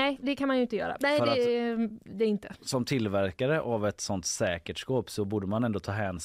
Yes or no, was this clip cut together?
yes